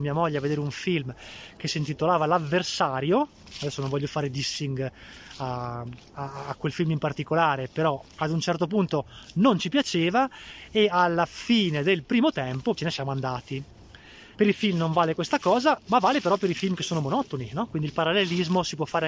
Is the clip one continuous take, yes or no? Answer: no